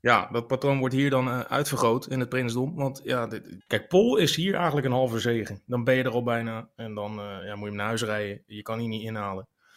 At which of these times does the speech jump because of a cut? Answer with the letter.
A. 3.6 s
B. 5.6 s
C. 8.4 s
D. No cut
A